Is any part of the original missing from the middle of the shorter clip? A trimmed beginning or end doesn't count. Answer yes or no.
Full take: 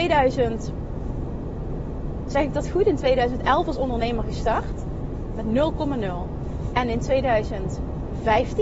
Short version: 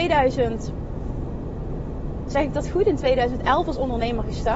no